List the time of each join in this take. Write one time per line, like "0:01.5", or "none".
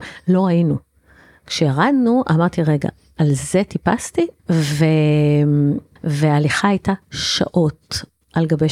0:04.4
0:06.0